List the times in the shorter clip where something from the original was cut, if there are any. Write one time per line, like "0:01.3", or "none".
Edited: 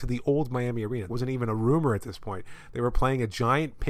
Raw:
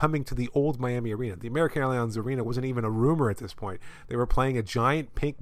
0:01.1

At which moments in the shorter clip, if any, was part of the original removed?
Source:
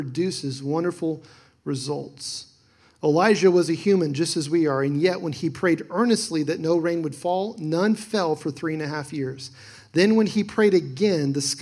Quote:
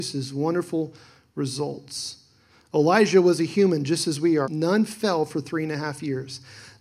0:04.4

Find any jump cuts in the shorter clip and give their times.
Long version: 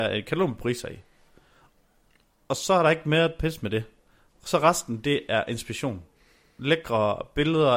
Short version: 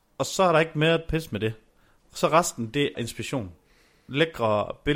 0:02.9

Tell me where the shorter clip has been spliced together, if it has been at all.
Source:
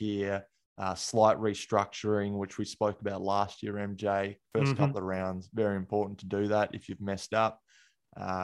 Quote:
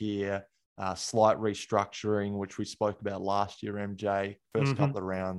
none

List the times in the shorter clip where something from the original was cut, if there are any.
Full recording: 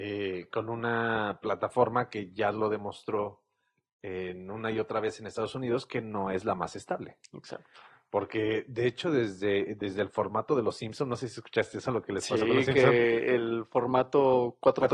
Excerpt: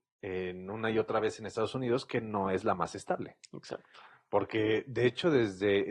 none

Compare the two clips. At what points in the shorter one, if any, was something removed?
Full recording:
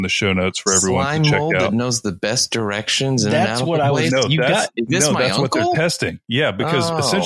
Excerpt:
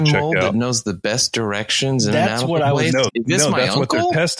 0:03.1

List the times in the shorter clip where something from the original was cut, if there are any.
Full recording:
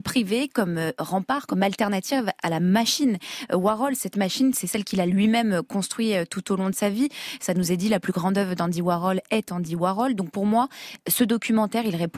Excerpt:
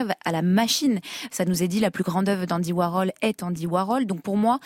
0:01.3

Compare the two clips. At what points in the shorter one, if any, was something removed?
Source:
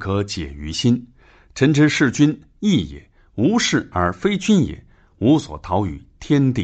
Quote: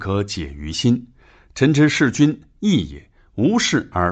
none

